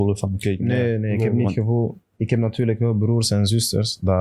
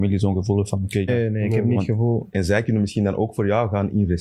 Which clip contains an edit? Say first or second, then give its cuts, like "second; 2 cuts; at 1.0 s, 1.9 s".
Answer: second; 2 cuts; at 1.1 s, 2.3 s